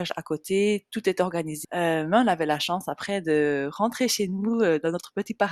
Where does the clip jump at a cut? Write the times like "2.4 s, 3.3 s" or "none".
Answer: 1.6 s